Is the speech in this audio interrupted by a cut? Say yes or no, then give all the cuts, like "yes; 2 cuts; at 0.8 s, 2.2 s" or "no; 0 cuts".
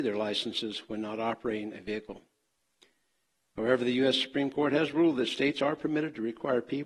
no; 0 cuts